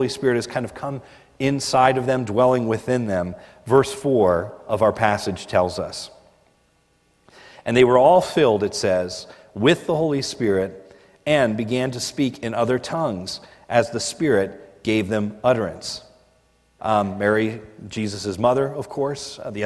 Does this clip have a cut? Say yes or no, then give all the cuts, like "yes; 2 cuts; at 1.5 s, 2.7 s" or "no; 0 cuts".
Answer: yes; 1 cut; at 16.8 s